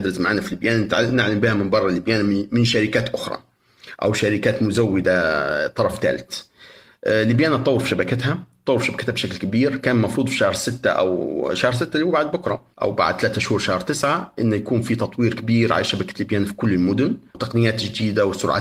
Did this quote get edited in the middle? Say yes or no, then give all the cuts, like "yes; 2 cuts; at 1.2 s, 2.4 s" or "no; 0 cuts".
yes; 2 cuts; at 12.7 s, 17.3 s